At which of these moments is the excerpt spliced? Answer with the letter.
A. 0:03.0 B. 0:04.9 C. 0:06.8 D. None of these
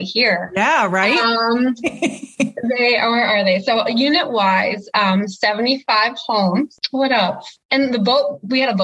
C